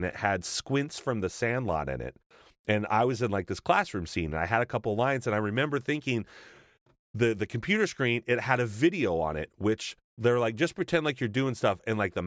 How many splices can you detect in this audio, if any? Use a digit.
0